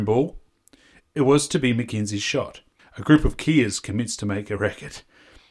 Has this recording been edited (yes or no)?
yes